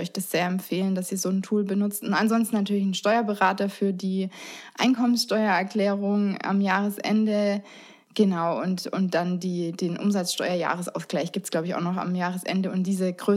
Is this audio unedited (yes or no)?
yes